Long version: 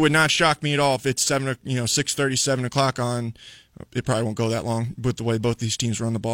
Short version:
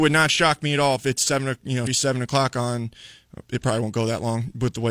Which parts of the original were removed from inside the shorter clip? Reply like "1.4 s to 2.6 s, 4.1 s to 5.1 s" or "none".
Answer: 1.9 s to 2.3 s